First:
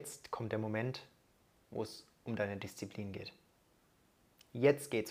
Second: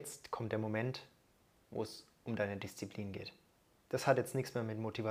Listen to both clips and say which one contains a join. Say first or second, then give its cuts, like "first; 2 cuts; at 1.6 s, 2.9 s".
second; 1 cut; at 3.7 s